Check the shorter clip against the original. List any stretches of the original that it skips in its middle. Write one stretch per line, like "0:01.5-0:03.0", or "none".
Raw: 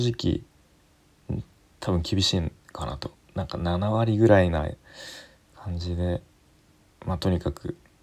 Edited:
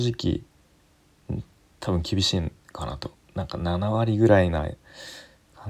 none